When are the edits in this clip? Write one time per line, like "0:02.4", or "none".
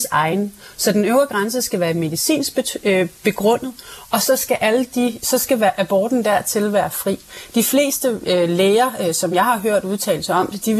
none